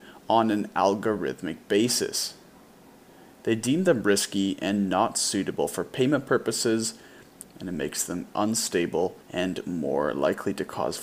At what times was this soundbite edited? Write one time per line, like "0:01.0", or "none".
0:07.4
0:09.2

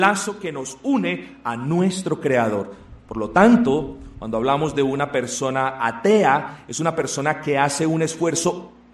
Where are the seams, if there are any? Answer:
none

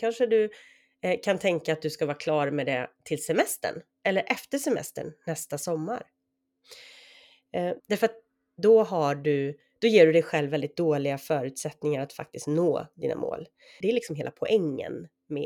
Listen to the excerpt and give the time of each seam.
0:07.8
0:13.8

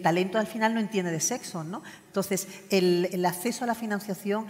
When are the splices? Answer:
0:02.1
0:03.1

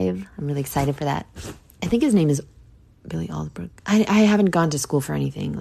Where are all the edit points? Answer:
0:03.8

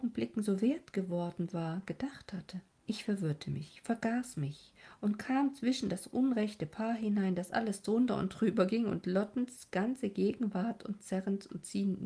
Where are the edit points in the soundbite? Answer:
0:02.8

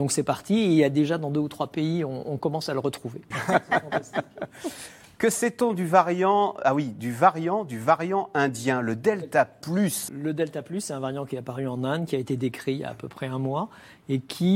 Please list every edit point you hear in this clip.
0:03.3
0:10.1

